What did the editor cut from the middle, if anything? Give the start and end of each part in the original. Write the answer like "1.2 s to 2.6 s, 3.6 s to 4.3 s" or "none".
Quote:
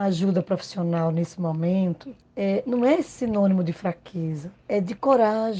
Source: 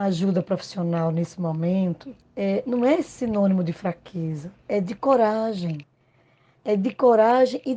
none